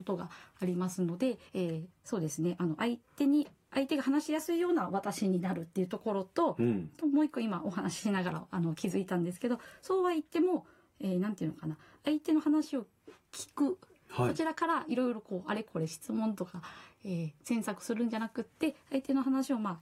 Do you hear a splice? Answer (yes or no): yes